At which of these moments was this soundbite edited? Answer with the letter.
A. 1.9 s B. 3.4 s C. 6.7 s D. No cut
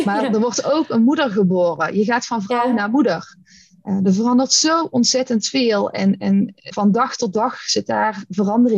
C